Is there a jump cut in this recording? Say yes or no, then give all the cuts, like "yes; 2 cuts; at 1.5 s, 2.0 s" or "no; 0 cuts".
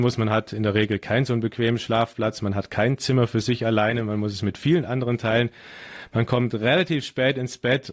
no; 0 cuts